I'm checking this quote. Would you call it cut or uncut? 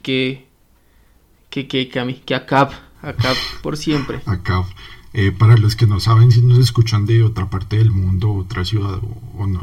uncut